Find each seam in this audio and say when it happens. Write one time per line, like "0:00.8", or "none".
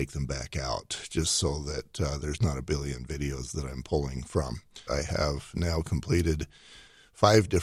0:04.9